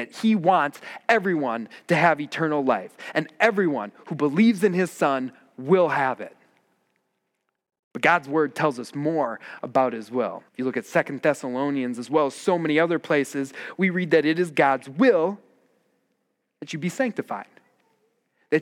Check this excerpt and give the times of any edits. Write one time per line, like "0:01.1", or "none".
0:10.5